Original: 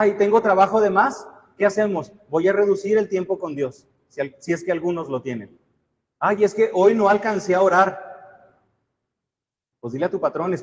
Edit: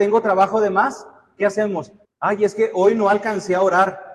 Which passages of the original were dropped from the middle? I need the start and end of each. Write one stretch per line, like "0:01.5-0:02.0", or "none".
0:02.2-0:06.0

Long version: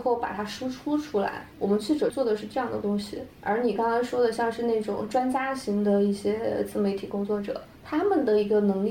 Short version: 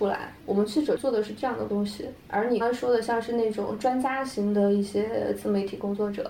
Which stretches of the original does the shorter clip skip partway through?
0:03.7-0:03.9

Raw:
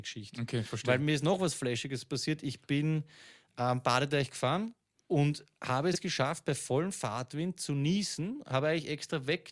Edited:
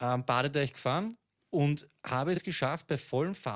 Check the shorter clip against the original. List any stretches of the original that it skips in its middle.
none

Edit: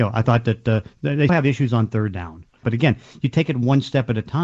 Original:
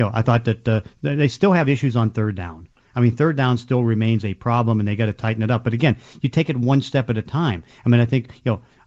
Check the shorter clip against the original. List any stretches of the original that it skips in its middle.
0:01.3-0:01.5
0:02.9-0:05.6

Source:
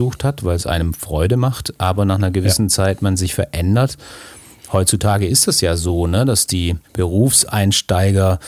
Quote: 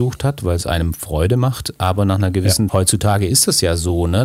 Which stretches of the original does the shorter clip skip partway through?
0:02.7-0:04.7

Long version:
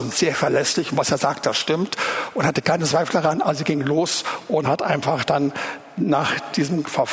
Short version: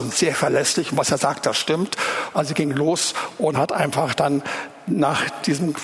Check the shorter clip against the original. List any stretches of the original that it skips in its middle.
0:02.3-0:03.4

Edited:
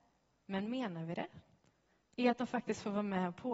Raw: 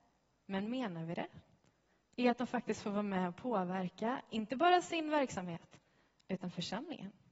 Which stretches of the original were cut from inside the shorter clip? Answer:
none

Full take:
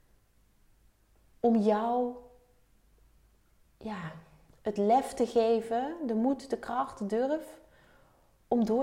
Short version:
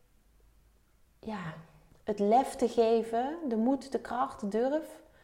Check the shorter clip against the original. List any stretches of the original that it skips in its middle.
none

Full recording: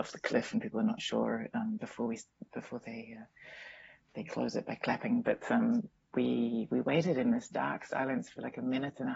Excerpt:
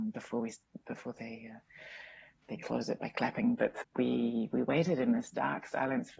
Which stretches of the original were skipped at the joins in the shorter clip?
0:05.5-0:06.0

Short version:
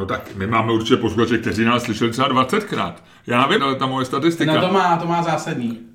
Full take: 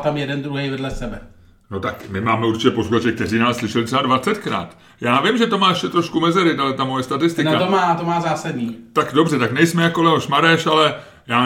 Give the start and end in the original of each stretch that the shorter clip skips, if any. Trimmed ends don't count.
0:05.3-0:06.6

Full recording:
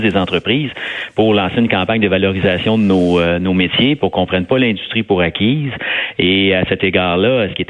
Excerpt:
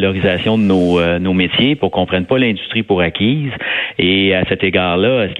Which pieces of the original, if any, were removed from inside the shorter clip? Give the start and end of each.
none

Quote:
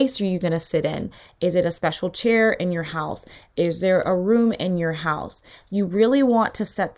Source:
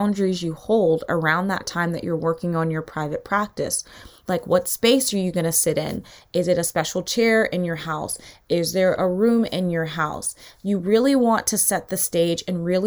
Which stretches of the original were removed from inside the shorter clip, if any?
none

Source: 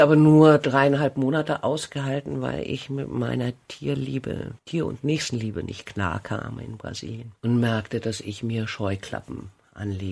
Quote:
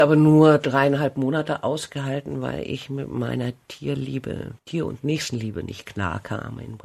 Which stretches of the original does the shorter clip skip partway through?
none

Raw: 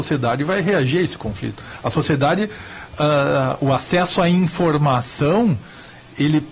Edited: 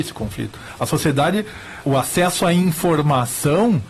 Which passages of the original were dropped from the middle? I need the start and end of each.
0:02.9-0:03.6

